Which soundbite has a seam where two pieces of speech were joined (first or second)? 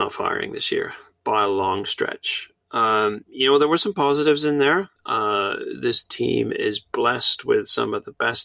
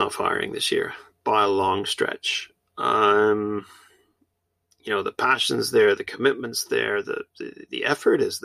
first